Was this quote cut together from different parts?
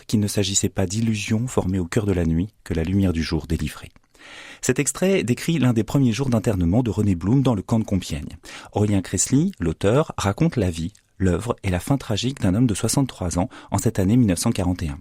no; 0 cuts

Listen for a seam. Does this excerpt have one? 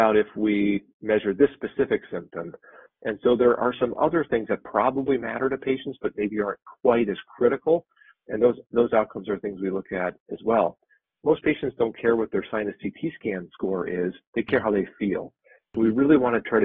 no; 0 cuts

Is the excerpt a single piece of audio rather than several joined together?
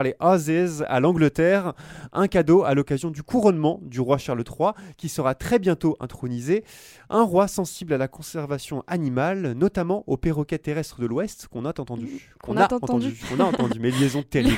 yes; 0 cuts

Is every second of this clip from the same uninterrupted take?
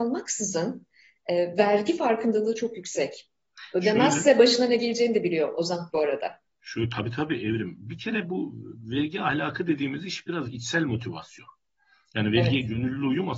yes; 0 cuts

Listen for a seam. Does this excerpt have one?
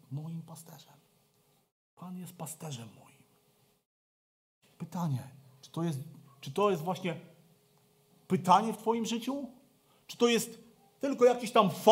no; 0 cuts

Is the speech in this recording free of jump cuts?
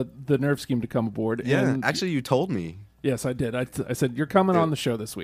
yes; 0 cuts

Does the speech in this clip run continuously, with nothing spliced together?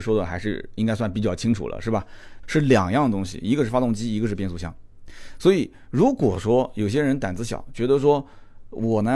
no; 1 cut; at 2.4 s

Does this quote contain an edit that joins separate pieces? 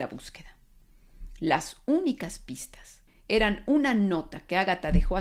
yes; 1 cut; at 3.1 s

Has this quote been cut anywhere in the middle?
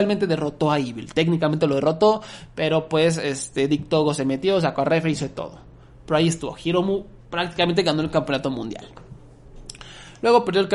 no; 0 cuts

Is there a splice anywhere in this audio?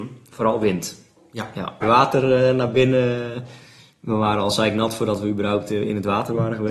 yes; 1 cut; at 1.8 s

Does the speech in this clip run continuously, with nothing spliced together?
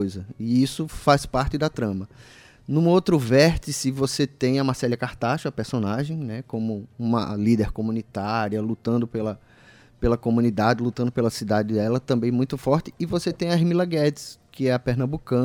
yes; 0 cuts

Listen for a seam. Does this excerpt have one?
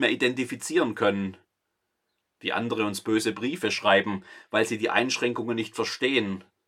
no; 0 cuts

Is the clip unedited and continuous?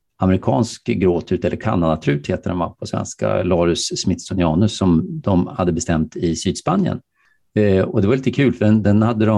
yes; 0 cuts

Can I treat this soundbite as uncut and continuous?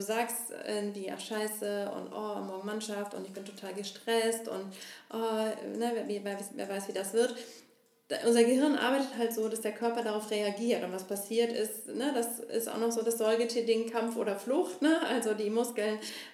yes; 0 cuts

